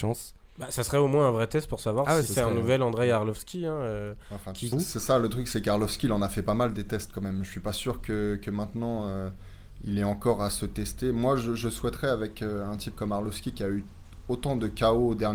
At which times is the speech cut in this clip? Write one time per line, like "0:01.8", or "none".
0:04.7